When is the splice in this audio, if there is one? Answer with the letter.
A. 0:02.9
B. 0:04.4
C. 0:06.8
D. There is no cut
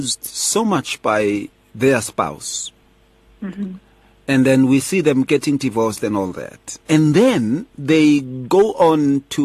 C